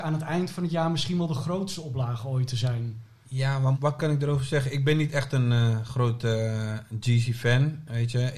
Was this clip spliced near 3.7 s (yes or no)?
yes